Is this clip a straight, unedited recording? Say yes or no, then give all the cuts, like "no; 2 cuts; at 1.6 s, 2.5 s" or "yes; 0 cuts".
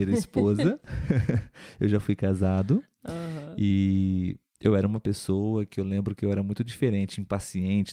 yes; 0 cuts